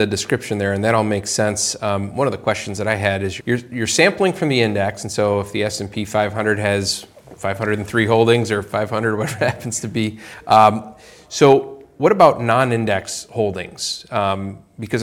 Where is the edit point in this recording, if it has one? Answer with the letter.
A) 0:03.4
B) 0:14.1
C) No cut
A